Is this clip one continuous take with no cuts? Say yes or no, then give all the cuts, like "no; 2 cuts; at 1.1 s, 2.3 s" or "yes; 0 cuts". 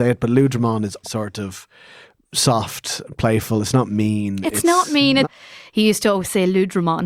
no; 2 cuts; at 1.0 s, 5.2 s